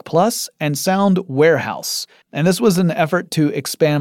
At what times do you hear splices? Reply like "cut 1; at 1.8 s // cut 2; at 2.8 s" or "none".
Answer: cut 1; at 2.2 s

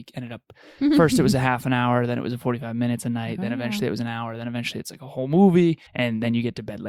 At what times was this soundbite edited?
cut 1; at 5.9 s

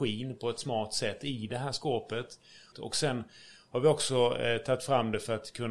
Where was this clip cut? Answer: cut 1; at 2.7 s

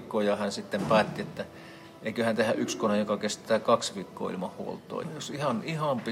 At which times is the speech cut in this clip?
cut 1; at 5.0 s

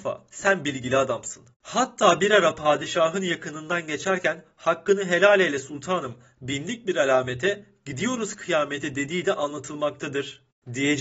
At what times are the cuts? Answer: cut 1; at 1.5 s

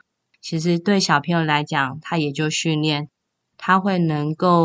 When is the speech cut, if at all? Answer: cut 1; at 3.4 s

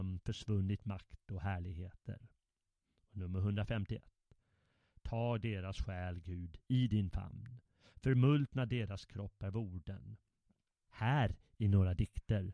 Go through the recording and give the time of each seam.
cut 1; at 10.9 s

